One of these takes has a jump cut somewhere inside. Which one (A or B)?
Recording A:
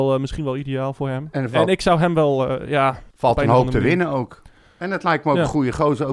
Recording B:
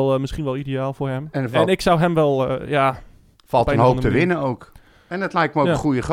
A